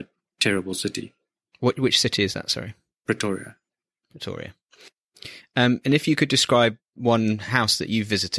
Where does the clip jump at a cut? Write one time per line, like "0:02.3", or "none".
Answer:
none